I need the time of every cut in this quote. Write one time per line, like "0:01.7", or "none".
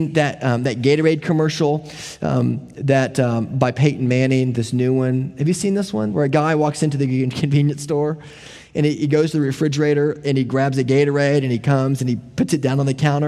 0:06.1